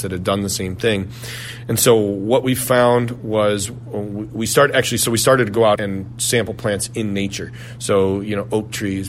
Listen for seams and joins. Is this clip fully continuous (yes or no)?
no